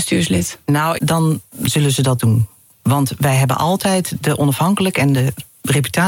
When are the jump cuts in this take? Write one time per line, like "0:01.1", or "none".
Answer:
0:01.0